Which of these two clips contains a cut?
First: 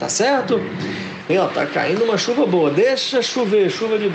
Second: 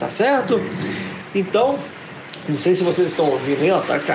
first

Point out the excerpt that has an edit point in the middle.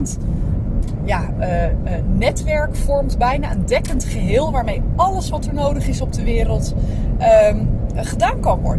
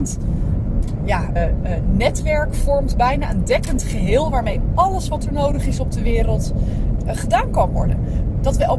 second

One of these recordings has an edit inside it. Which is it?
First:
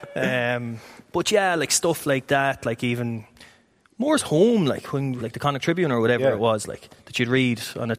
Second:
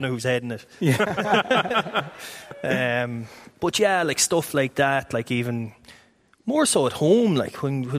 first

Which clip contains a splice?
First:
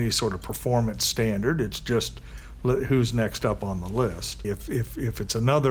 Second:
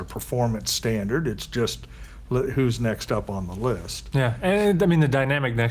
first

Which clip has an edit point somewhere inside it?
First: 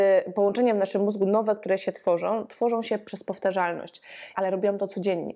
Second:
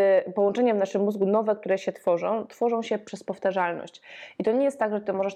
first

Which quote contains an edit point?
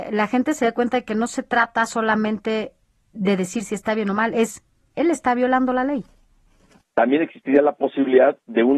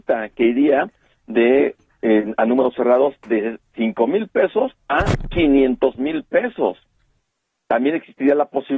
first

